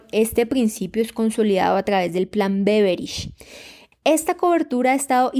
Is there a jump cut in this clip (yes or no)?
yes